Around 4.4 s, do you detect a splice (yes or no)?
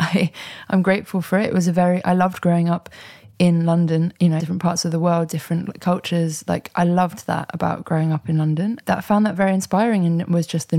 yes